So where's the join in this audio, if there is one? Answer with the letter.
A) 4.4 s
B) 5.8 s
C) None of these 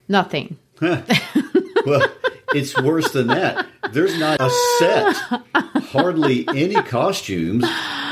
A